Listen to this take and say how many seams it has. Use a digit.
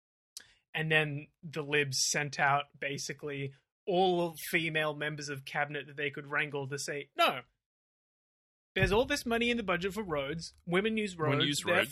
0